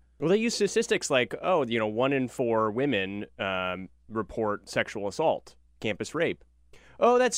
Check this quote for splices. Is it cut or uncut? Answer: uncut